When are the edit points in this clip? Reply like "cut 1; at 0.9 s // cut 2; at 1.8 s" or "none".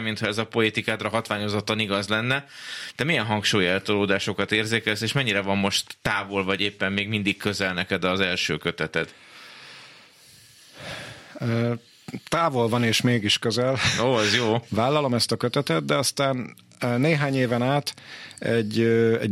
cut 1; at 14.7 s